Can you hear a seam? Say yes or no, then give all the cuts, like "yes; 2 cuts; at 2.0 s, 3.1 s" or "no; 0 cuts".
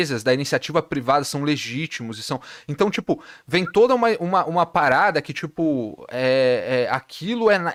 no; 0 cuts